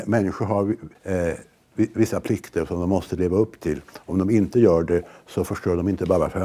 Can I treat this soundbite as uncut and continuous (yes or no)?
no